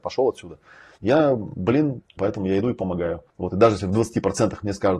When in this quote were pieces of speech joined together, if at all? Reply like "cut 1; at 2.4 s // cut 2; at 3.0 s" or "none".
cut 1; at 1.0 s // cut 2; at 2.2 s // cut 3; at 3.3 s